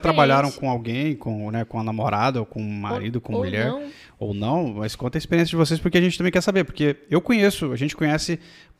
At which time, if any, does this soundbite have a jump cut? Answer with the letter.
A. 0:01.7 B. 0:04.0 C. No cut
C